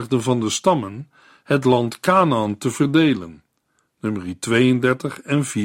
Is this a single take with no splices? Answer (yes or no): yes